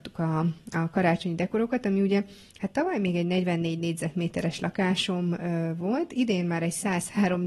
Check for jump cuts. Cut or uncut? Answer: uncut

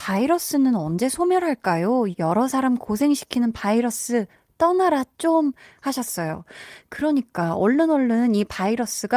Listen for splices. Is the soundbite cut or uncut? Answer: cut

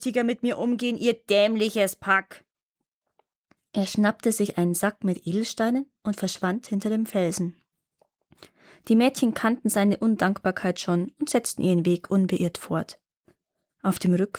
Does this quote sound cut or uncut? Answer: uncut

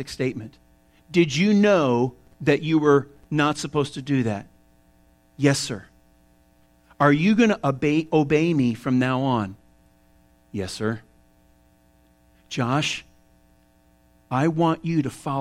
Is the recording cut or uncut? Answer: uncut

